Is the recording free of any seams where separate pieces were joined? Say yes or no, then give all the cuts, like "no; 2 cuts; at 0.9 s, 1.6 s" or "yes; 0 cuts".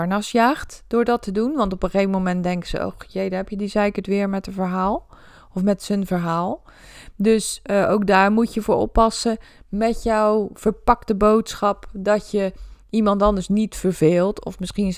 yes; 0 cuts